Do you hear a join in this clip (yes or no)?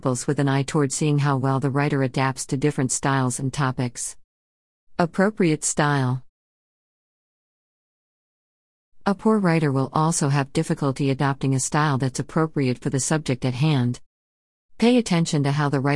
no